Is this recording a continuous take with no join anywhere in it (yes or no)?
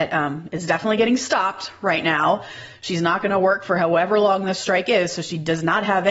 yes